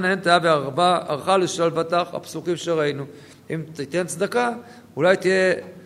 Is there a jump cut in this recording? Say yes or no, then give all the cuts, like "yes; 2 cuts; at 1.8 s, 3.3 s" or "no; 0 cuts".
no; 0 cuts